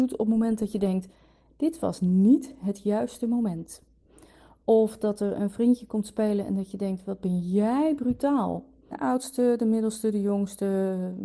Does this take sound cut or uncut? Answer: cut